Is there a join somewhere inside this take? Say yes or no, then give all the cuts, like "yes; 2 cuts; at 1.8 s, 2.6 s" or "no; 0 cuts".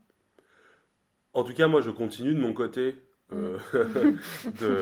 no; 0 cuts